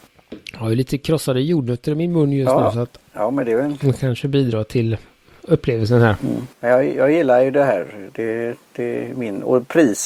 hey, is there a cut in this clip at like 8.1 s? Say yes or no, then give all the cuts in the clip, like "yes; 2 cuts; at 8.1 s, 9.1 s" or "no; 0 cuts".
no; 1 cut; at 6.5 s